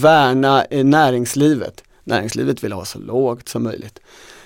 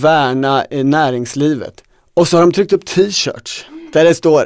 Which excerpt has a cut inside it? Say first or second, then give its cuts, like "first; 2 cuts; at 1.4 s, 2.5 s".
second; 1 cut; at 2.0 s